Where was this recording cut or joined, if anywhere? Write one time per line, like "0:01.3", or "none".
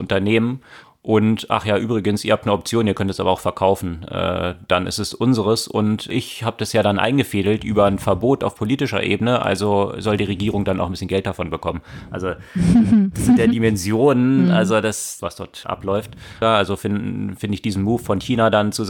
0:15.2
0:16.4